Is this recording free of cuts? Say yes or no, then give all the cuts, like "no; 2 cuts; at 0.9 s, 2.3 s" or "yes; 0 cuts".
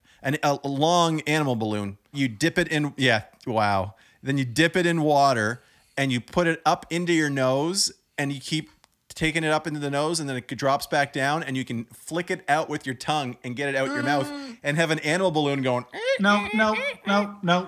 no; 2 cuts; at 2.1 s, 16.5 s